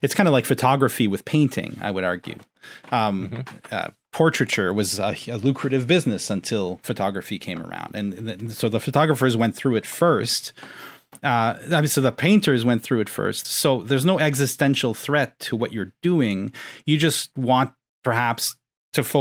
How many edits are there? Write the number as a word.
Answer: one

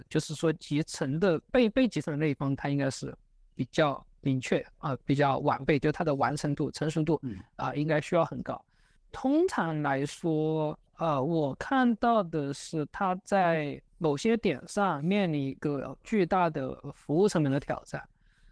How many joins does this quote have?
three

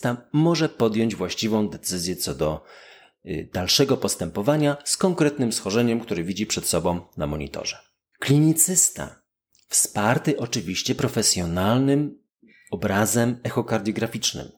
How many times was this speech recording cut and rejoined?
one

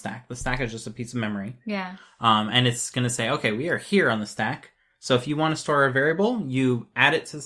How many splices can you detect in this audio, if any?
zero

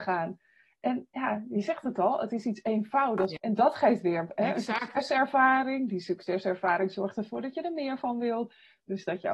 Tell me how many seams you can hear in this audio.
one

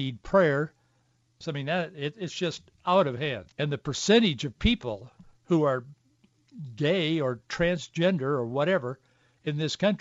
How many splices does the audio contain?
two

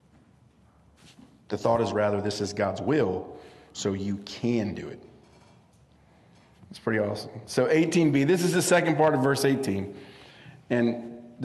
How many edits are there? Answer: one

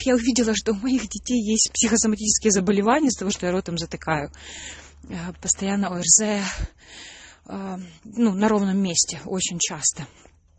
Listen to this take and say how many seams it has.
two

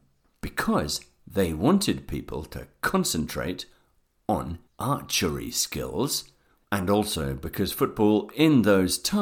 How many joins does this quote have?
one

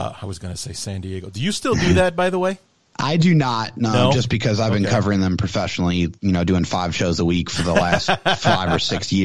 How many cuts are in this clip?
zero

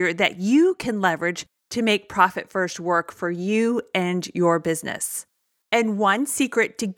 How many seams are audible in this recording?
one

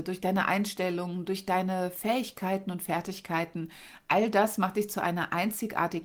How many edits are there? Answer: zero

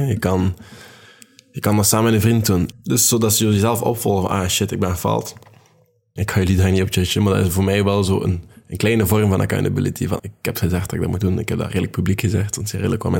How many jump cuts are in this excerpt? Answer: three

